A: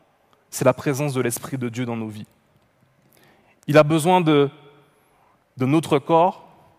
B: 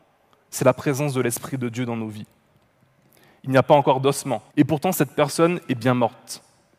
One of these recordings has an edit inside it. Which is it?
B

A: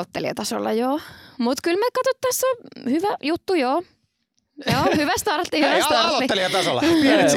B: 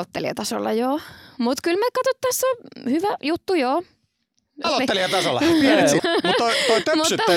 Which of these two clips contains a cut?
B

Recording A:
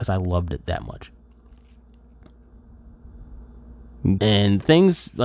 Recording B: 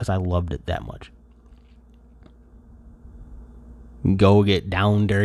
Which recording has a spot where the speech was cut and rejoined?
A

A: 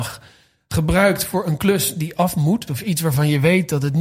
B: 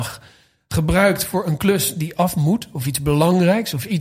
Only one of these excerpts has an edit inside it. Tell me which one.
A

